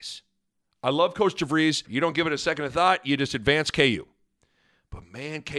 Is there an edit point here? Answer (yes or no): yes